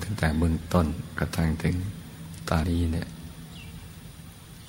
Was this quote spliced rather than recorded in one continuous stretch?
yes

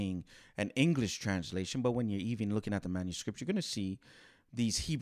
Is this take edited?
no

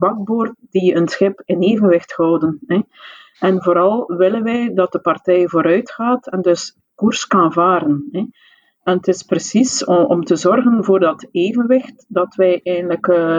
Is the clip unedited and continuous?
yes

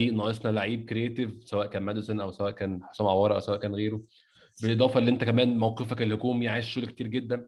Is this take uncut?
yes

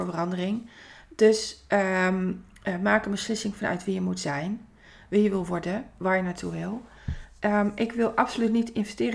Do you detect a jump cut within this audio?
no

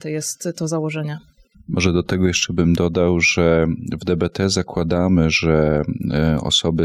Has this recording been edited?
no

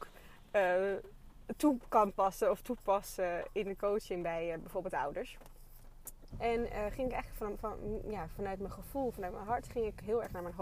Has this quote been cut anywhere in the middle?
yes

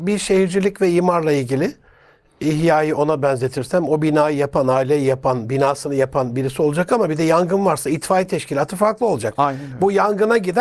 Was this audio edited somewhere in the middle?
no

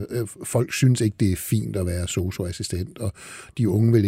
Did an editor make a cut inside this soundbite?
no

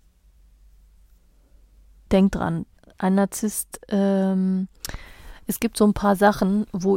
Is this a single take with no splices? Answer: no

